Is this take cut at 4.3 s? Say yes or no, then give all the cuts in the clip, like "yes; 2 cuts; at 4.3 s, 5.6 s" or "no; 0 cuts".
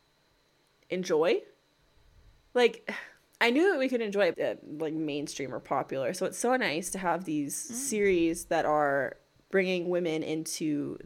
yes; 1 cut; at 4.3 s